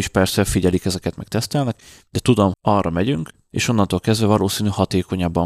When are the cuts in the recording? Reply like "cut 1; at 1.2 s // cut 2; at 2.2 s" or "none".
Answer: cut 1; at 2.5 s